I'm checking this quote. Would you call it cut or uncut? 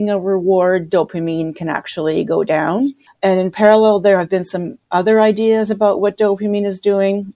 cut